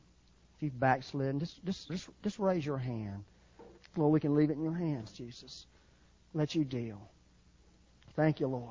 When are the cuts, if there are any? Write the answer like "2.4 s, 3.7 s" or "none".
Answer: 1.9 s, 3.8 s